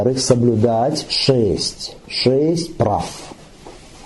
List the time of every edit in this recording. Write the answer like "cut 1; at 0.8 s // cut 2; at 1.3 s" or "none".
none

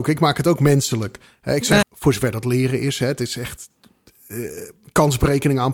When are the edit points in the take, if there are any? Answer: cut 1; at 1.8 s

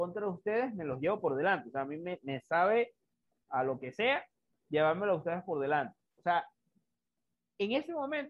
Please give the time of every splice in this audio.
cut 1; at 6.2 s

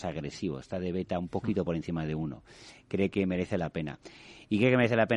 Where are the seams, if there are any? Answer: none

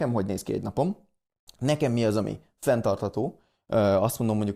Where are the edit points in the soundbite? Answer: none

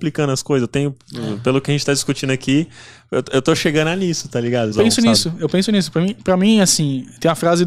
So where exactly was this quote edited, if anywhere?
cut 1; at 4.7 s

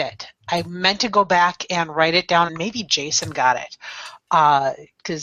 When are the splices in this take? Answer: cut 1; at 2.5 s

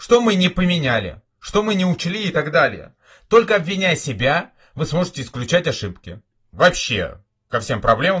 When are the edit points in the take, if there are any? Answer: cut 1; at 6.5 s

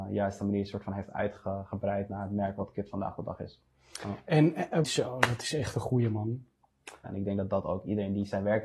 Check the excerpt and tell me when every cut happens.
cut 1; at 4.8 s // cut 2; at 7.0 s

